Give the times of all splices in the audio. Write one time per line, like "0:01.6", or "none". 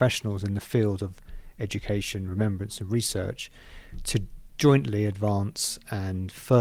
none